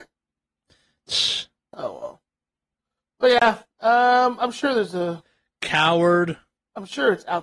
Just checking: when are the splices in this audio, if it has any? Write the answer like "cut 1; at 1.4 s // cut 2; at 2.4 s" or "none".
none